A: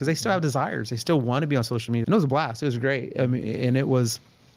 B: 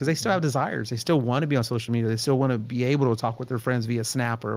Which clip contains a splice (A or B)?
A